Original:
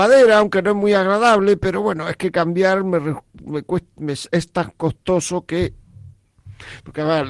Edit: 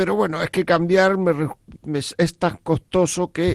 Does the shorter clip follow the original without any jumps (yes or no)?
no